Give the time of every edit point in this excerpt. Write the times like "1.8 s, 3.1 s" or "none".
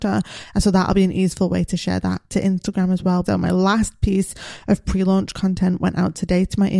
3.2 s